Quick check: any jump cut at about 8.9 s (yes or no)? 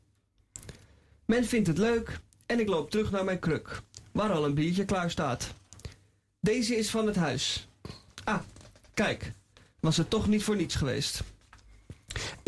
no